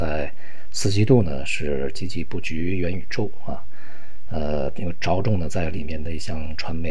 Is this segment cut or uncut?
uncut